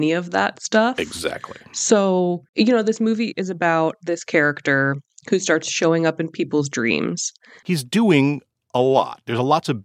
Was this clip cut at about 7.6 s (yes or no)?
yes